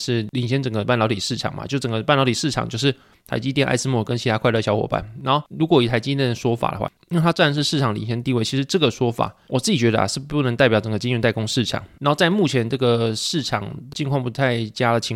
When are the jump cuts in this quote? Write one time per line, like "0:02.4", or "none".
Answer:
0:12.0